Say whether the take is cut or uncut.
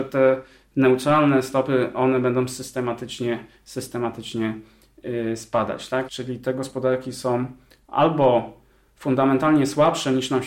cut